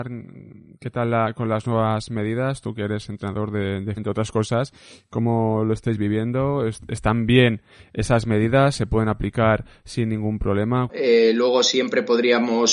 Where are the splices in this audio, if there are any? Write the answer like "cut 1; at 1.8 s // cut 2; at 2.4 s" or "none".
cut 1; at 4.0 s // cut 2; at 10.9 s